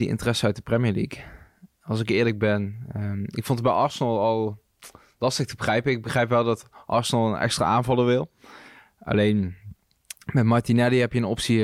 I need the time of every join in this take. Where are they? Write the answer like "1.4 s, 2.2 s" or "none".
none